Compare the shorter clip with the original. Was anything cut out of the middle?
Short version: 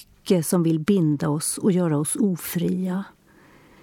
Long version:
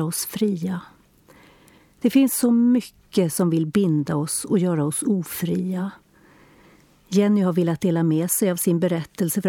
no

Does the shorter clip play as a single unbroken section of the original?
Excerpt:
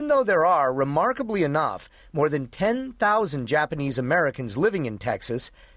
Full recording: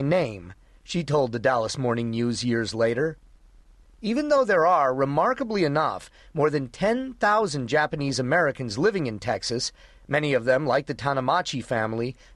yes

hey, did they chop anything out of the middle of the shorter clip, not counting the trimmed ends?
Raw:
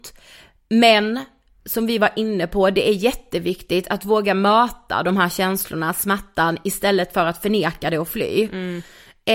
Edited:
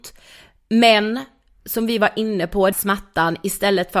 yes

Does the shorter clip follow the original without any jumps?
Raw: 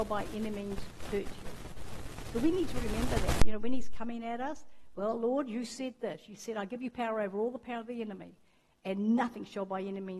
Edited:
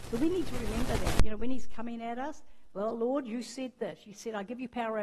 yes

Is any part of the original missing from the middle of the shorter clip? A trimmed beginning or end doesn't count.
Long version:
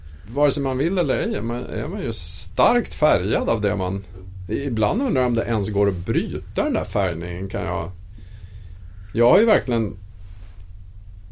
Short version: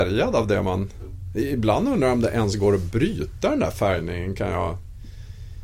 no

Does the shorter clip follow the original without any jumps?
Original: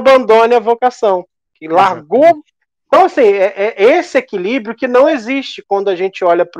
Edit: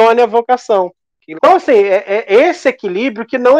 no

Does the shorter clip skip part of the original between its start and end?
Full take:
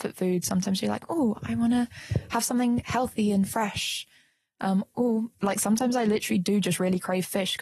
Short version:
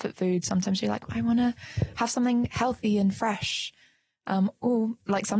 yes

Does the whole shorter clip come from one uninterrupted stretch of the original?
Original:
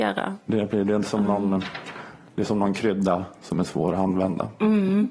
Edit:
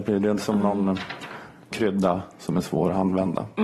no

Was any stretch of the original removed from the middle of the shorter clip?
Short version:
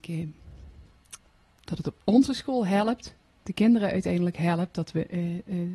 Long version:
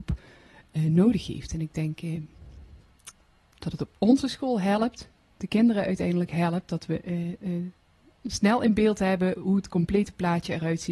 no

